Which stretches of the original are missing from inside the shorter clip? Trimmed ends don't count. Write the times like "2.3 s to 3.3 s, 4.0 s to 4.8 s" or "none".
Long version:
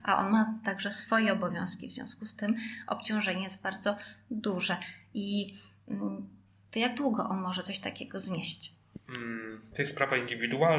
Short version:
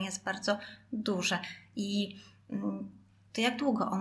none